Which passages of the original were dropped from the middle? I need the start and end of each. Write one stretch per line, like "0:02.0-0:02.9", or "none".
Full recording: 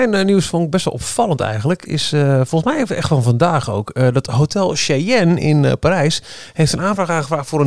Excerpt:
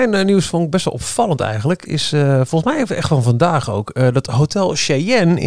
none

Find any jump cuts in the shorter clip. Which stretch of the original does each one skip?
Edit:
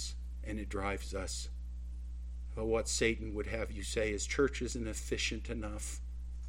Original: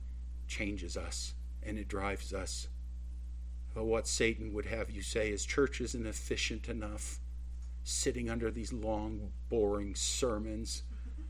none

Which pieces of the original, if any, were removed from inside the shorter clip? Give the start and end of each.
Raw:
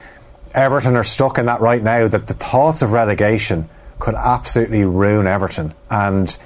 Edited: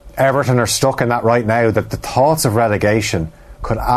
none

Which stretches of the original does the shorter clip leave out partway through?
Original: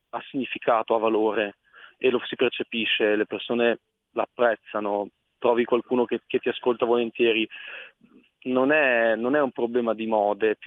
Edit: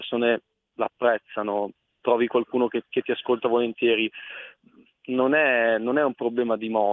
none

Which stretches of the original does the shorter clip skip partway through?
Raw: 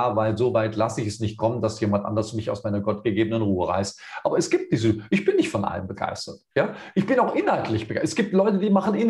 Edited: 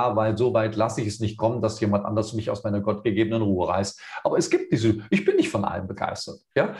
none

